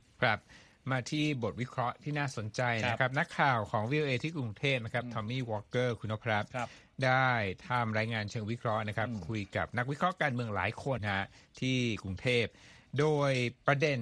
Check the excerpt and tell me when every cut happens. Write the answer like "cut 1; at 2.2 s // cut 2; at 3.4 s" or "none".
cut 1; at 11.0 s